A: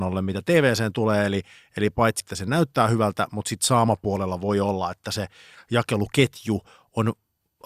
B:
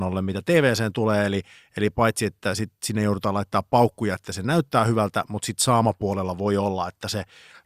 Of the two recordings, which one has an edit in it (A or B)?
A